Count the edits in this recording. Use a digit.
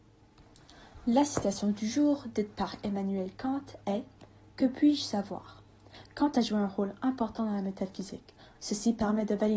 1